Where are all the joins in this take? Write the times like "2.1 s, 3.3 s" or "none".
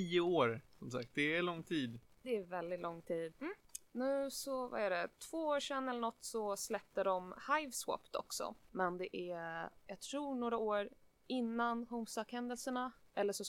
3.3 s, 8.7 s